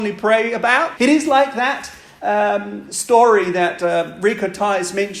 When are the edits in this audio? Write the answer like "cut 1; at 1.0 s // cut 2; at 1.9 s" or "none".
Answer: cut 1; at 1.0 s